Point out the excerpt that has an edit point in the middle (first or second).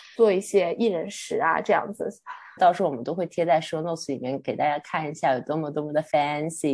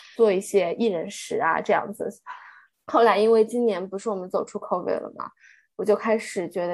first